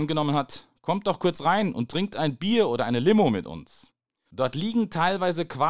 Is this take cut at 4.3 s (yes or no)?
yes